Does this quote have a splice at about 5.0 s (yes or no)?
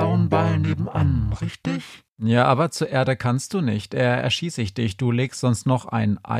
no